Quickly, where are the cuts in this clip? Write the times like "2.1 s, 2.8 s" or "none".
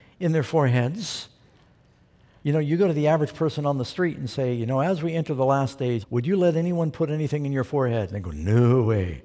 2.4 s, 6.0 s